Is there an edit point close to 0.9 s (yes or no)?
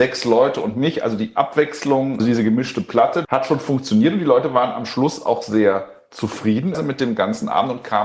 no